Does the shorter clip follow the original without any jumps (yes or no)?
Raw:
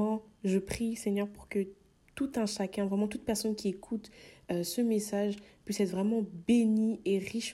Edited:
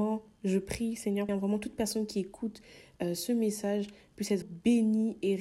no